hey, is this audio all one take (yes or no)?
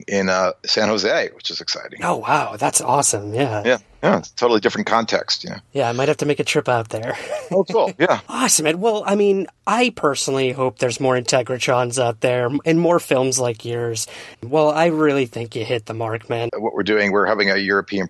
no